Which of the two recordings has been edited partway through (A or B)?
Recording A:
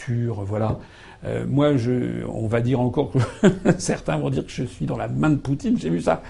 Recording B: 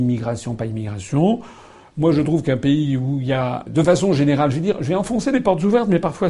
B